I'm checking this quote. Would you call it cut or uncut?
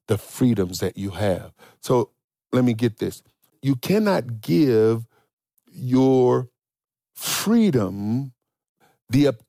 cut